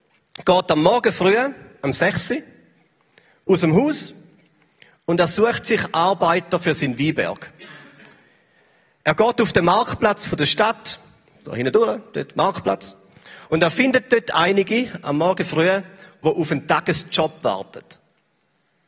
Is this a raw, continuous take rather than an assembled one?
yes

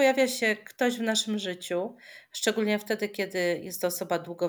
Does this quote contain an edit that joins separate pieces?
no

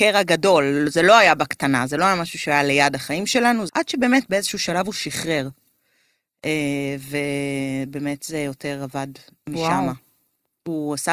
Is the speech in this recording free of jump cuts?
no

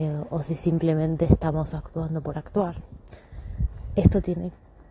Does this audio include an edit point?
no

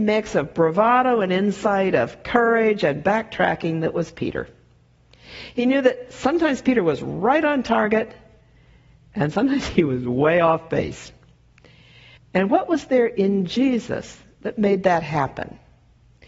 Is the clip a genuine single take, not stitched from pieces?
no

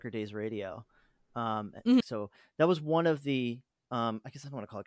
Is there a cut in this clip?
yes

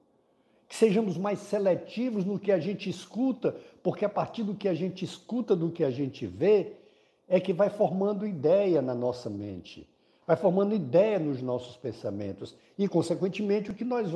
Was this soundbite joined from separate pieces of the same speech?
no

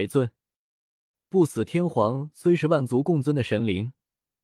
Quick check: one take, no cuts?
yes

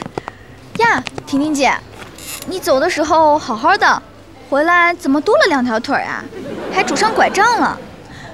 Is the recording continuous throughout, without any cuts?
yes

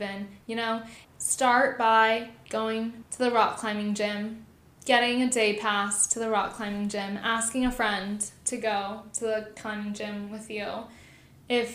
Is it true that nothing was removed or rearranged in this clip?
no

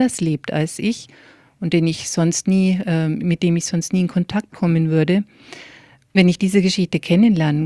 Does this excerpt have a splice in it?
no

